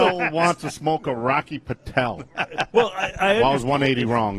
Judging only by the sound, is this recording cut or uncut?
uncut